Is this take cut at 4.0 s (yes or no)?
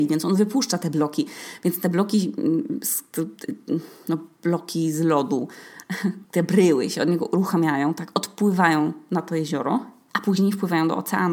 no